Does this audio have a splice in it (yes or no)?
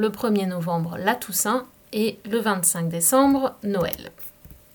no